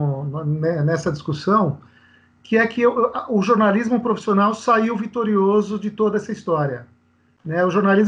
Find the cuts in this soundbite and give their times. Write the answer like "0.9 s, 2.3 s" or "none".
none